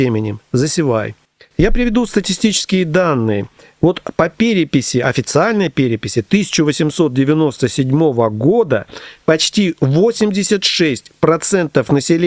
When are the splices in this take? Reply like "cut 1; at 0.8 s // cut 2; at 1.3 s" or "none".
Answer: none